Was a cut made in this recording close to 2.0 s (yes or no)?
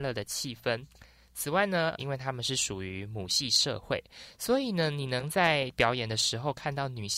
yes